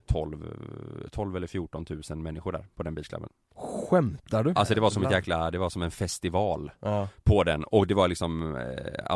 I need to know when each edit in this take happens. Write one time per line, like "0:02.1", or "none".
0:04.6